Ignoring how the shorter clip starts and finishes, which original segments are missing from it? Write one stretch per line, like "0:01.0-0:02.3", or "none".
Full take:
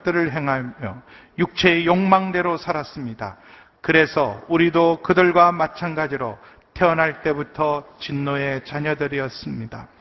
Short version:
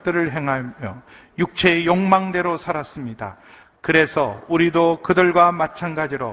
none